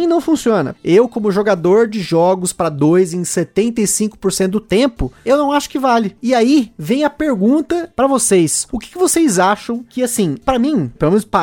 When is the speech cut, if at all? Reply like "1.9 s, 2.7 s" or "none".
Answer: none

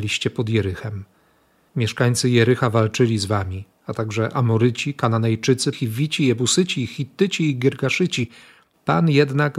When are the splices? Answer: 5.7 s

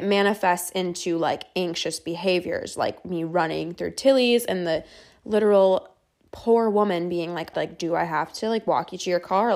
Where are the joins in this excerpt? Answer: 7.5 s

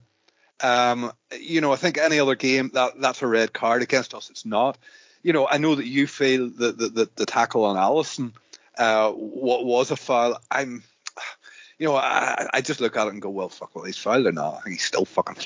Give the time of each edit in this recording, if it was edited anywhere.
none

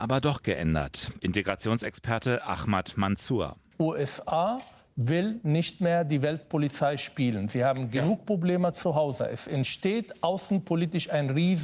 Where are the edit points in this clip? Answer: none

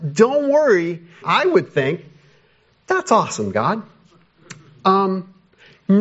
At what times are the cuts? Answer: 1.2 s

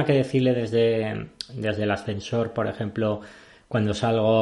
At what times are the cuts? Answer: none

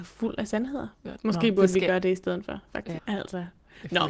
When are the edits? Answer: 0.9 s, 3.0 s

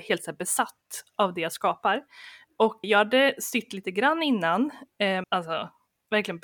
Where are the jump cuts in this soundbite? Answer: 2.8 s, 5.2 s

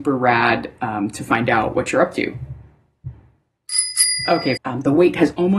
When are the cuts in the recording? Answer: 4.6 s

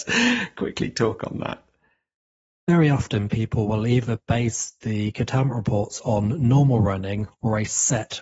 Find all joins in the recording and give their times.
none

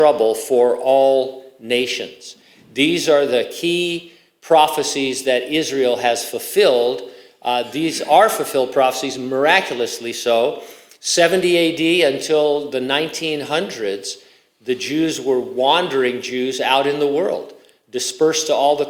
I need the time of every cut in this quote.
none

